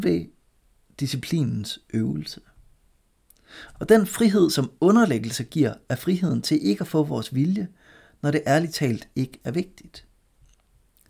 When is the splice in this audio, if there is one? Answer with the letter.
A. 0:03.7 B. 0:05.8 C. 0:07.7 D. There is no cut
A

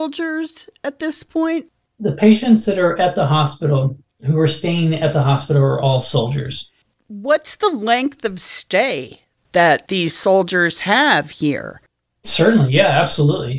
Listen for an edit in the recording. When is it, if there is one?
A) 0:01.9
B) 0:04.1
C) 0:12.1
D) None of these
C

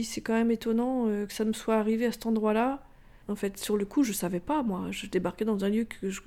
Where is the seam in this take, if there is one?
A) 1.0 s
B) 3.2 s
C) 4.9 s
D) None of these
B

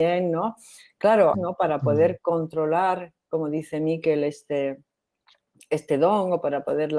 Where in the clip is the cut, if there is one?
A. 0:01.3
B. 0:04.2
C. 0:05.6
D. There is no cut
A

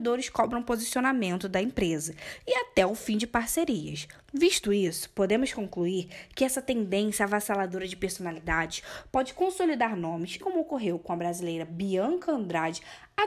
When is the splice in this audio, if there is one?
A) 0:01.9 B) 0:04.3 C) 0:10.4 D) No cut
C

